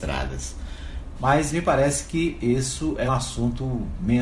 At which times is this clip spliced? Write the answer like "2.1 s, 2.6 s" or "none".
1.2 s, 3.1 s